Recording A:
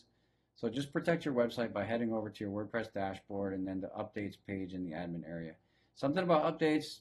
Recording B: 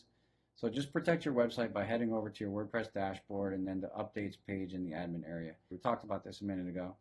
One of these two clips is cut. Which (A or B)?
B